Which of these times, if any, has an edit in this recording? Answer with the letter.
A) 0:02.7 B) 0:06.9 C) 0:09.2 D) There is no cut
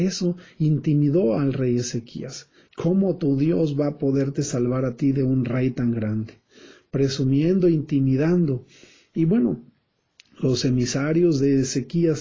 A